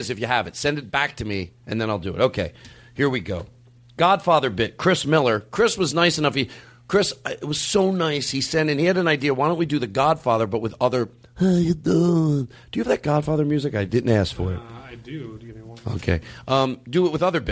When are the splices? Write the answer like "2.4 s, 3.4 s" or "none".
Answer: none